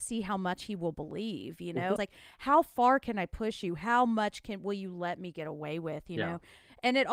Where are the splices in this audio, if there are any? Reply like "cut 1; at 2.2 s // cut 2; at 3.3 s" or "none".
cut 1; at 2.0 s